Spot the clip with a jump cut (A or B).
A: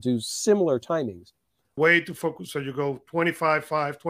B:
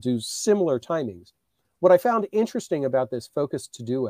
A